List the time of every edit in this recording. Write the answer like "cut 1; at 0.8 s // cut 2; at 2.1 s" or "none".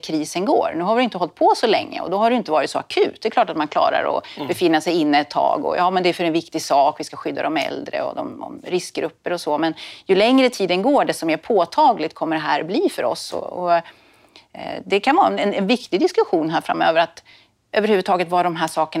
none

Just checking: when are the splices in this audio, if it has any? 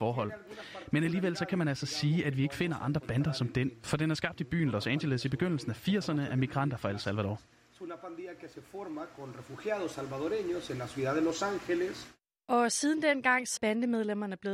cut 1; at 13.6 s

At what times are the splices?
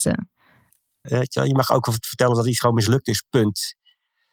cut 1; at 1.0 s

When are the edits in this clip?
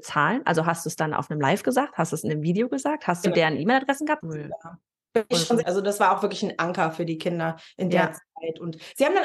cut 1; at 4.2 s // cut 2; at 5.6 s

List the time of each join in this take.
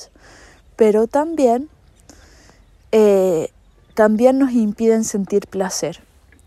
none

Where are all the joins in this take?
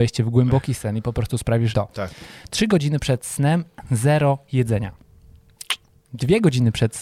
cut 1; at 1.7 s

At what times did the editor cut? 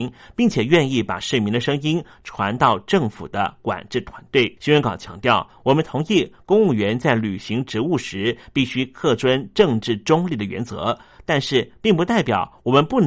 cut 1; at 4.6 s

